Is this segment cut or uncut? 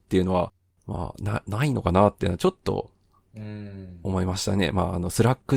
uncut